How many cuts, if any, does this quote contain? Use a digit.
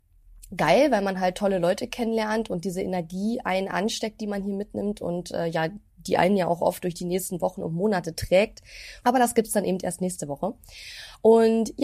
1